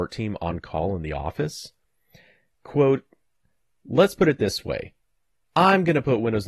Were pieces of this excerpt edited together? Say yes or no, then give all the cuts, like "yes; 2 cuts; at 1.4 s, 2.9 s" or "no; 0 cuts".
no; 0 cuts